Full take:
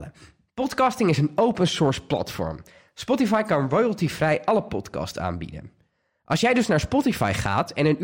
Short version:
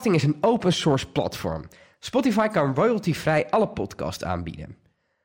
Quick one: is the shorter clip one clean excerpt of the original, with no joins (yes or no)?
yes